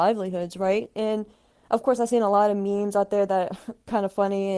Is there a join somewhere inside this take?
no; 0 cuts

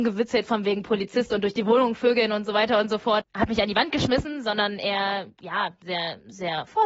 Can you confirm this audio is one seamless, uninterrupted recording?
no; 1 cut; at 3.2 s

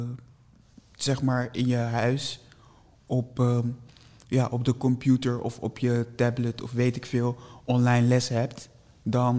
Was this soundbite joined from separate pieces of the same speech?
no; 0 cuts

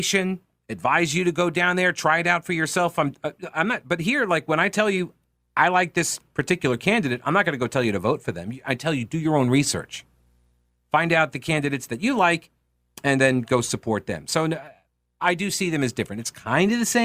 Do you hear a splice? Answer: no; 0 cuts

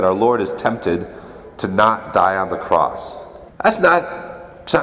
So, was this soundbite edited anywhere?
yes; 1 cut; at 3.5 s

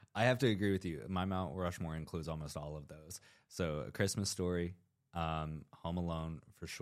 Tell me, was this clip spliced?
no; 0 cuts

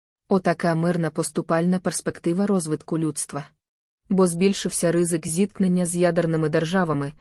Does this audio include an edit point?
yes; 1 cut; at 4.0 s

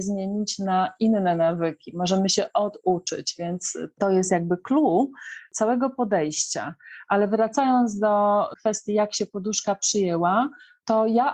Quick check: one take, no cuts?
yes; 0 cuts

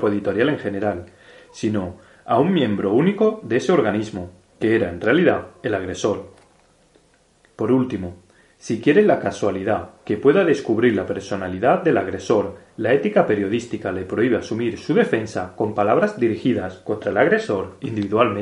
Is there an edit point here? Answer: yes; 1 cut; at 7.5 s

